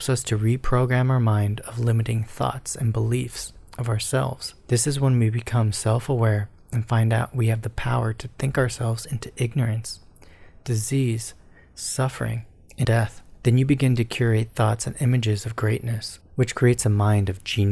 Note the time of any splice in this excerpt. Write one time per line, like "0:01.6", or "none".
0:12.8
0:16.2